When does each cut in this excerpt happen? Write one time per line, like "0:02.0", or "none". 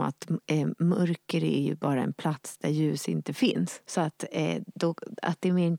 0:03.8